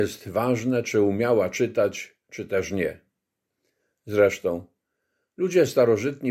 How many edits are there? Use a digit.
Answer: 0